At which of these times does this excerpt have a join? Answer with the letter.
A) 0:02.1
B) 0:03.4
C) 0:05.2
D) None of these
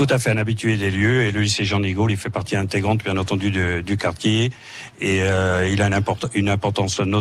D